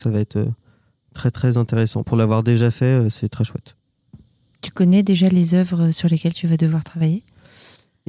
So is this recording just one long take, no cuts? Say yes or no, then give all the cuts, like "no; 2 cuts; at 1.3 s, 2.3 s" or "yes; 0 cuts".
yes; 0 cuts